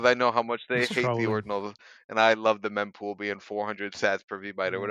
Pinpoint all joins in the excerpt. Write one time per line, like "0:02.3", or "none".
none